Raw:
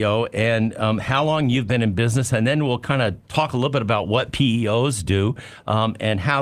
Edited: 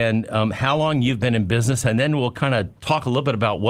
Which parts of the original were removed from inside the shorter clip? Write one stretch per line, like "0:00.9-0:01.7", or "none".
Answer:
none